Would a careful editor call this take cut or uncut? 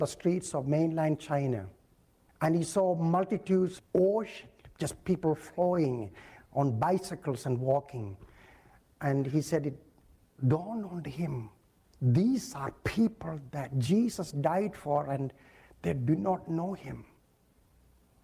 cut